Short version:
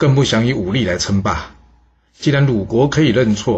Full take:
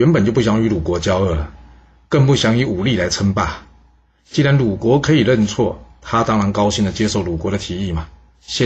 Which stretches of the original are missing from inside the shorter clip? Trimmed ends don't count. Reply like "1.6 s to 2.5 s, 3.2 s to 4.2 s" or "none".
none